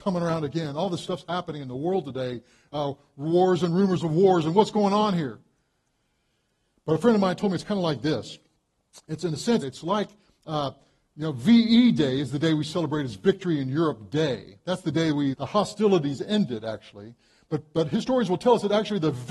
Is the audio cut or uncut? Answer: cut